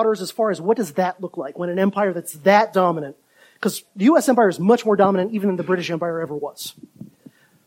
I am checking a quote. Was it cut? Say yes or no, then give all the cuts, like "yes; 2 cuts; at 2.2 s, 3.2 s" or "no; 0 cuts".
no; 0 cuts